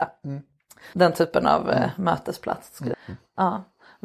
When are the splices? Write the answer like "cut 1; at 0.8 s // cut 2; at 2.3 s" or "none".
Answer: cut 1; at 0.9 s // cut 2; at 2.9 s